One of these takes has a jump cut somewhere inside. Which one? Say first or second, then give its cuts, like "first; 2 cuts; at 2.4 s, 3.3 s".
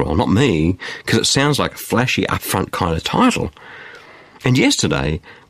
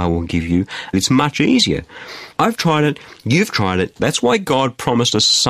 second; 3 cuts; at 0.9 s, 2.3 s, 4.0 s